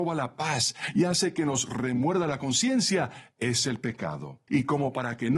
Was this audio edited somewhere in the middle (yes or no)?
yes